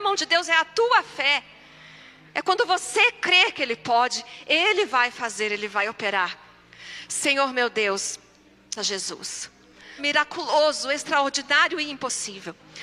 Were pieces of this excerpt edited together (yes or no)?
yes